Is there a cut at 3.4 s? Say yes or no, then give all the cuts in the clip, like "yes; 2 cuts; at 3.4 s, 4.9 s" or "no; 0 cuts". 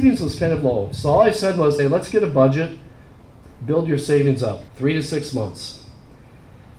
no; 2 cuts; at 1.8 s, 4.7 s